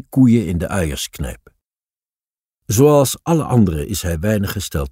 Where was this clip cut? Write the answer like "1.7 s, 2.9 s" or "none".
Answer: none